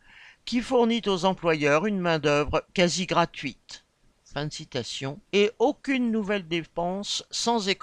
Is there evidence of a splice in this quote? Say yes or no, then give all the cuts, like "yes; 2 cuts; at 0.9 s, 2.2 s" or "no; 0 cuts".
yes; 2 cuts; at 4.2 s, 5.3 s